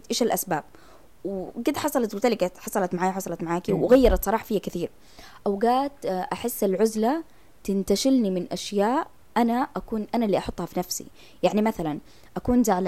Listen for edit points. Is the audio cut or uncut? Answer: uncut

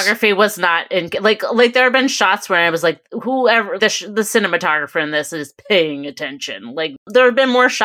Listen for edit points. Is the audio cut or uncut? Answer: cut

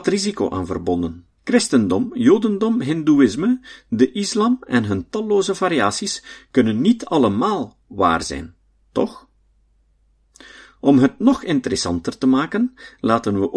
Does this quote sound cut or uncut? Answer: cut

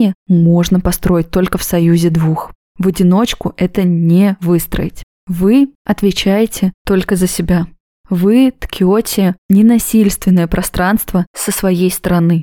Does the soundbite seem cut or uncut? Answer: uncut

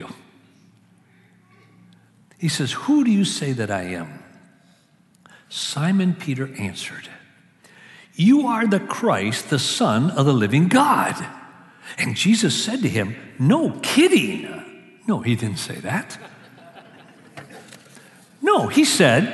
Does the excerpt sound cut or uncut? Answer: uncut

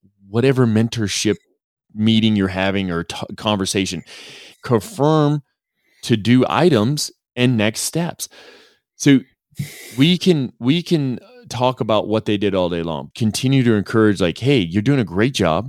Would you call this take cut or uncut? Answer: cut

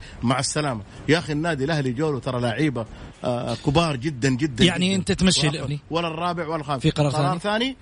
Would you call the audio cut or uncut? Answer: cut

